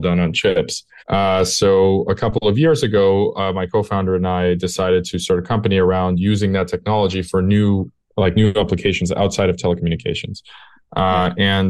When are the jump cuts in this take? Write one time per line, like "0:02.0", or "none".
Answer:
0:01.0